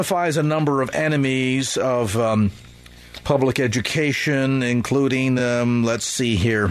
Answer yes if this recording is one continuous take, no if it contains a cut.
yes